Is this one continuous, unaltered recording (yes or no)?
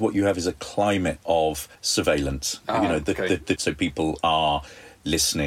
no